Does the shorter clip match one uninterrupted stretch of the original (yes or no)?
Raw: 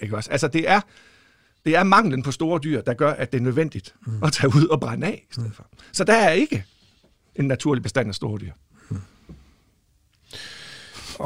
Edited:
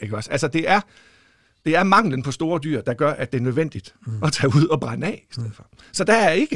yes